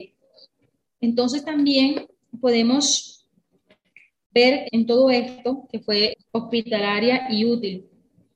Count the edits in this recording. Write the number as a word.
two